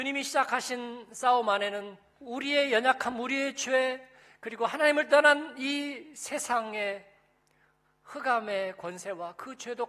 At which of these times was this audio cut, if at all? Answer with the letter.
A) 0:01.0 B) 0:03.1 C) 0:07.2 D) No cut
D